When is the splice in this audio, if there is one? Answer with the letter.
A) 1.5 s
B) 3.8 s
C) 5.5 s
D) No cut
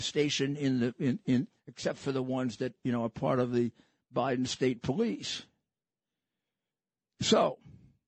A